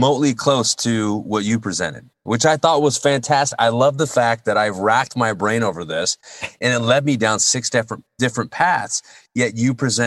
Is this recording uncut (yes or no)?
yes